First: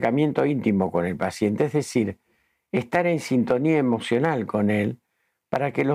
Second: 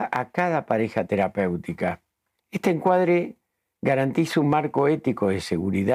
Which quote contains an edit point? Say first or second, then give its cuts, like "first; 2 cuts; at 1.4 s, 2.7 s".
second; 1 cut; at 2.4 s